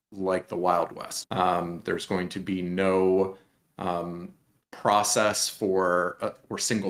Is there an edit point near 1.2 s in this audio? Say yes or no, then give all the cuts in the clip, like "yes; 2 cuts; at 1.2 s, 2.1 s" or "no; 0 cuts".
yes; 1 cut; at 1.2 s